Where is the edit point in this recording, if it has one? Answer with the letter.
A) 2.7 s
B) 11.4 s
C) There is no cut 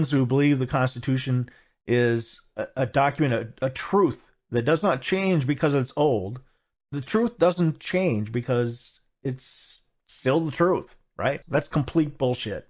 B